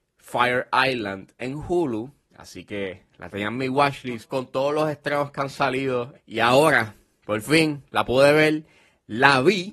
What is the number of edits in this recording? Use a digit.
1